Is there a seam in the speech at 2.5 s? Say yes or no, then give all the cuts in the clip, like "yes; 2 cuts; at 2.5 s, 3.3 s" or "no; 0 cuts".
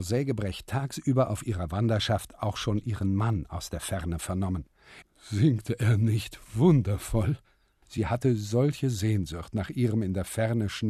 no; 2 cuts; at 5.0 s, 7.8 s